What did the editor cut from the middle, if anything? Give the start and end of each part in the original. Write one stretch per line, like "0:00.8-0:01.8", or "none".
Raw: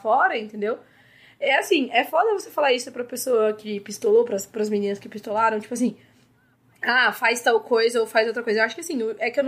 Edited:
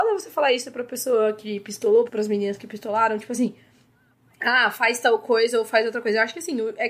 0:04.3-0:04.5